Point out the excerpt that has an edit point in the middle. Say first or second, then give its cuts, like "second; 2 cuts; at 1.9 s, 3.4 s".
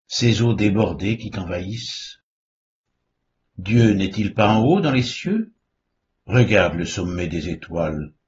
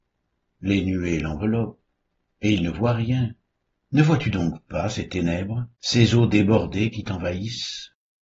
second; 2 cuts; at 3.7 s, 5.7 s